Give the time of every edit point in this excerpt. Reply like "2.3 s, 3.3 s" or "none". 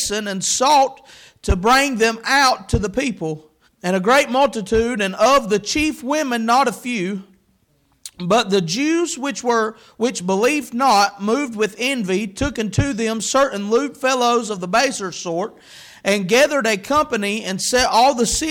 3.7 s